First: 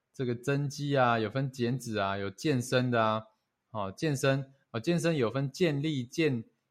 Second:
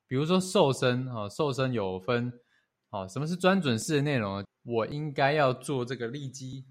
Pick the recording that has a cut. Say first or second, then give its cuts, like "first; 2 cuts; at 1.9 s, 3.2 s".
second; 2 cuts; at 2.8 s, 4.4 s